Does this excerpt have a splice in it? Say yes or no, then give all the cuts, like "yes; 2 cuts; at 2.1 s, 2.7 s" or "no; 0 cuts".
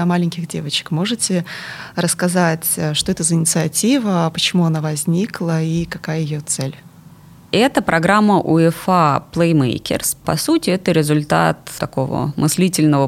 yes; 1 cut; at 10.2 s